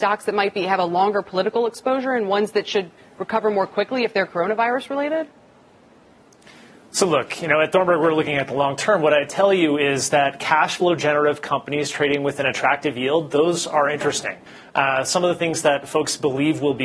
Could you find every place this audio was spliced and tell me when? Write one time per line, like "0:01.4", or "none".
none